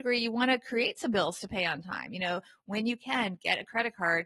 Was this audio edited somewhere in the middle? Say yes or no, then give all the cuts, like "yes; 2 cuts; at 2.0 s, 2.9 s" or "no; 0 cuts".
no; 0 cuts